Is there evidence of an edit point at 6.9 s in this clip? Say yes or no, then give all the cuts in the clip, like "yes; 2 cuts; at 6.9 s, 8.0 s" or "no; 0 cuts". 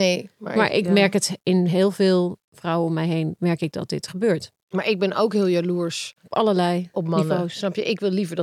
no; 0 cuts